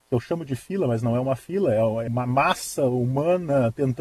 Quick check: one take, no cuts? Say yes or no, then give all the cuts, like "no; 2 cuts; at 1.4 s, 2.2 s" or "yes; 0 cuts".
no; 1 cut; at 2.1 s